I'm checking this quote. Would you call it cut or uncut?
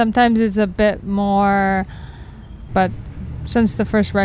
cut